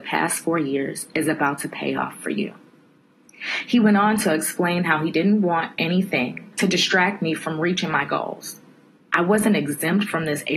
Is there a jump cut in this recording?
yes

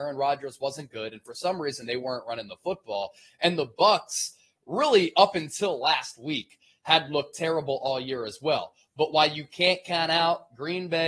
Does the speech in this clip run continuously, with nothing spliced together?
yes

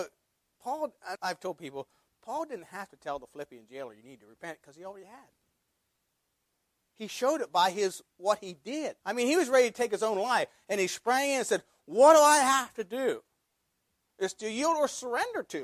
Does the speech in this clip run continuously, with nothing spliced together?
no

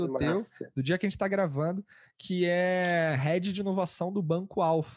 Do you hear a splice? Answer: no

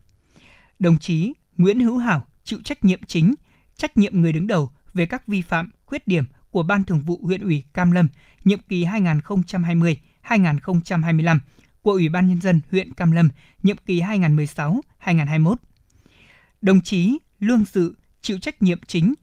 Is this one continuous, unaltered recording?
yes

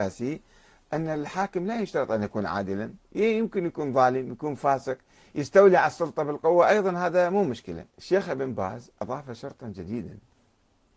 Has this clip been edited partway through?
yes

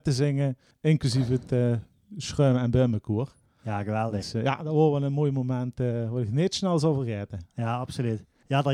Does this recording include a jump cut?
no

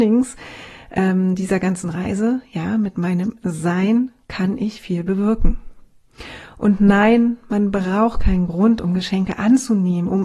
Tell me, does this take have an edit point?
no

